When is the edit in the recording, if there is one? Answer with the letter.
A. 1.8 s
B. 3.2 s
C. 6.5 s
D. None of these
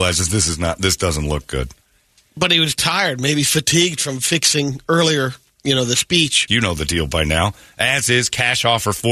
C